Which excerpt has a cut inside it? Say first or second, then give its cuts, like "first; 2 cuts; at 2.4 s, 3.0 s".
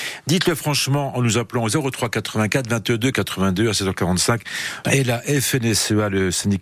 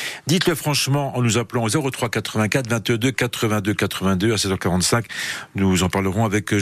first; 2 cuts; at 3.1 s, 4.8 s